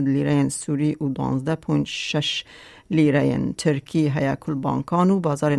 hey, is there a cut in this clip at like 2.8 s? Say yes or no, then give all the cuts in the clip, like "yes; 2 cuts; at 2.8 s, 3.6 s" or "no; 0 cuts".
no; 0 cuts